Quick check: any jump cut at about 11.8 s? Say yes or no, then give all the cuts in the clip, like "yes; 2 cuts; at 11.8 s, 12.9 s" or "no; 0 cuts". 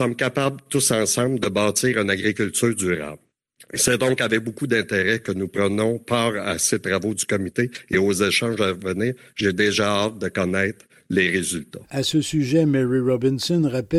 yes; 1 cut; at 11.8 s